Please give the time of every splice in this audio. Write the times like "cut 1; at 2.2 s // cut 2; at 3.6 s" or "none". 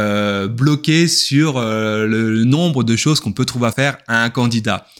cut 1; at 3.7 s